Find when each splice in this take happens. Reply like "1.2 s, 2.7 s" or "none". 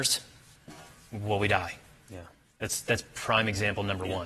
none